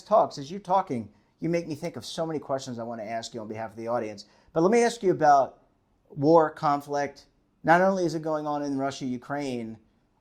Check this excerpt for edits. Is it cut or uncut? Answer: uncut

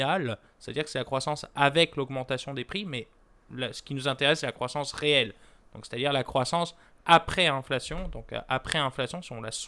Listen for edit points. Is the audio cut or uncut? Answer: uncut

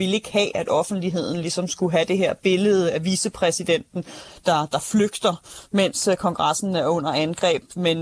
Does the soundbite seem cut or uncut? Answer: uncut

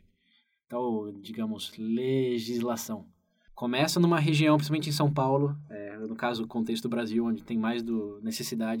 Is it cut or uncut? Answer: cut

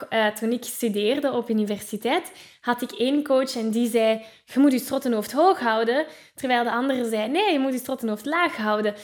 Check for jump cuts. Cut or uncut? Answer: uncut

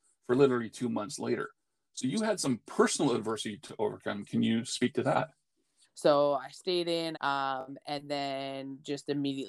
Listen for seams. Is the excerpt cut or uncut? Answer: cut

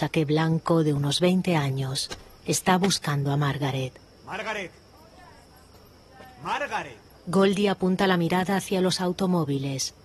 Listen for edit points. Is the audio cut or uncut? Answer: uncut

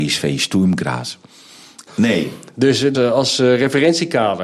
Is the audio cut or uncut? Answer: cut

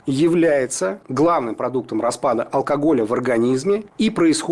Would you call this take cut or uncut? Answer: uncut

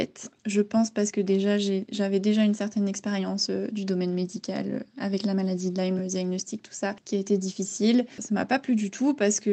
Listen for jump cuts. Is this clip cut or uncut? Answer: uncut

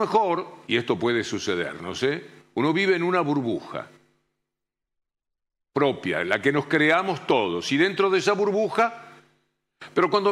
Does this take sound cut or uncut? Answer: uncut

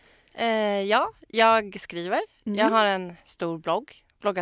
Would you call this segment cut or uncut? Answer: uncut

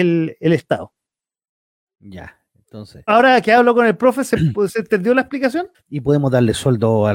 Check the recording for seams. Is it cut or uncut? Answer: cut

